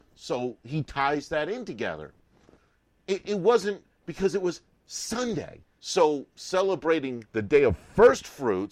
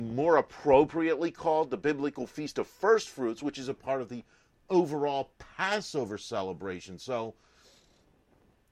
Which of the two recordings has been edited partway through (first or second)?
first